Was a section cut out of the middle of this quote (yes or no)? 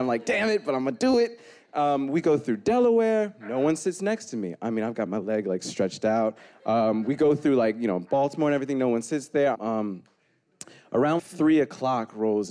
yes